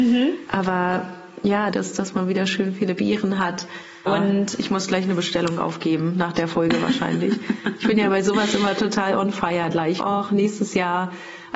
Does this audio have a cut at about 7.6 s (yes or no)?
no